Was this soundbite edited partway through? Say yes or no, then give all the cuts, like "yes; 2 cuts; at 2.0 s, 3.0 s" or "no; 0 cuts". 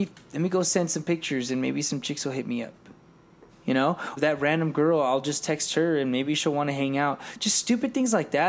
yes; 1 cut; at 4.2 s